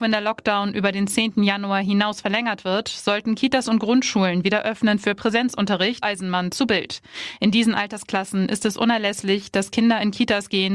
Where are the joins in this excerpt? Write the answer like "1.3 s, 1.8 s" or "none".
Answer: 6.0 s